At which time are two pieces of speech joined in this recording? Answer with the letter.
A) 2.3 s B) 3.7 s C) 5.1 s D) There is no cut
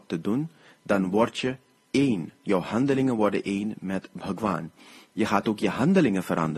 C